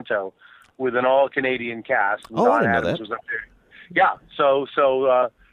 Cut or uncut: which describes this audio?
uncut